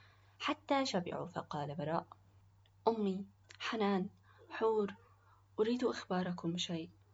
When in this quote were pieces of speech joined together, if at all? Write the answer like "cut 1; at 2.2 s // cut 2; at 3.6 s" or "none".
none